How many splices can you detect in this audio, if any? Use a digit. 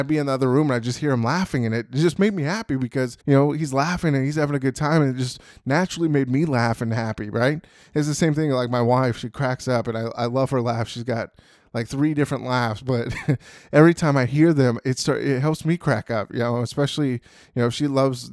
1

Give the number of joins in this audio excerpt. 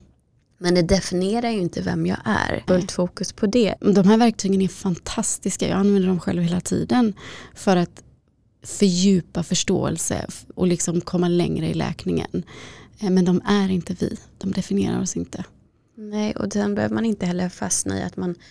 3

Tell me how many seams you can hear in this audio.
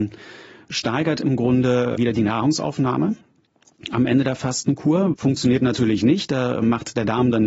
2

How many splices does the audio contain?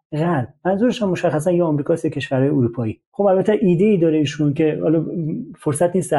1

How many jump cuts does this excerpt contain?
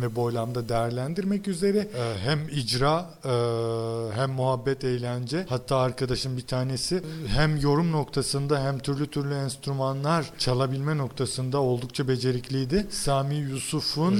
0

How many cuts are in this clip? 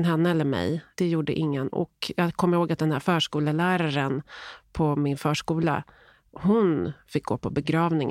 0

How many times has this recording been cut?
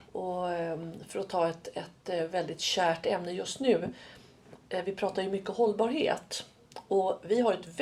0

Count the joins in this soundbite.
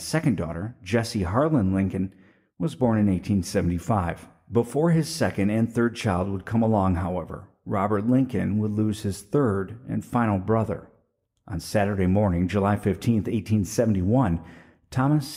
0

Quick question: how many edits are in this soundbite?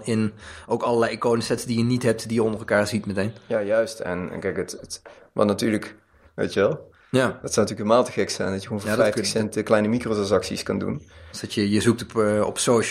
2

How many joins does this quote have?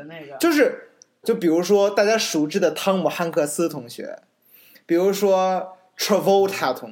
1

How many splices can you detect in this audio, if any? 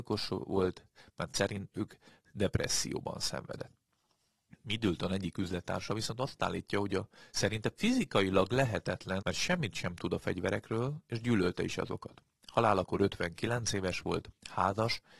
1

